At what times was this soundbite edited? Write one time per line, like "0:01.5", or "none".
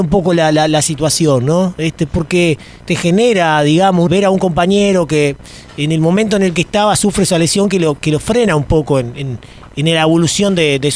0:04.1